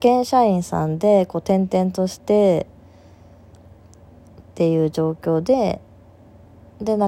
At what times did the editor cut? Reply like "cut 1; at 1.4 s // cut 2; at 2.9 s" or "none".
cut 1; at 2.2 s